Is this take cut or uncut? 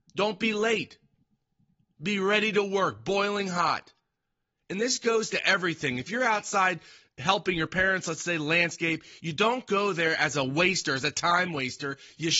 uncut